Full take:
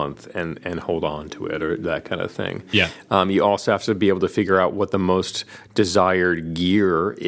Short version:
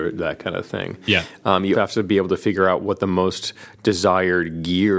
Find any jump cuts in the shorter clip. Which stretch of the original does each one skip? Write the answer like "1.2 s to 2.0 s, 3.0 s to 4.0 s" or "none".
3.4 s to 3.7 s